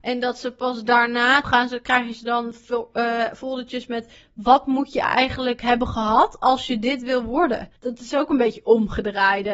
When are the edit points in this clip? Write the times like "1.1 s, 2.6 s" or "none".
1.4 s, 7.8 s